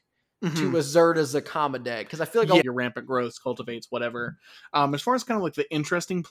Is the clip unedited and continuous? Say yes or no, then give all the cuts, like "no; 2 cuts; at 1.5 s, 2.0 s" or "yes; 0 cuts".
no; 1 cut; at 2.6 s